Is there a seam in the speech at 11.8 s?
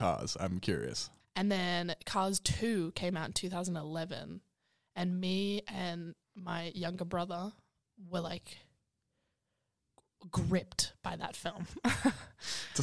no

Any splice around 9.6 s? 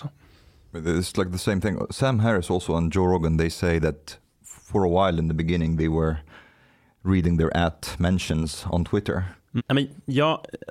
yes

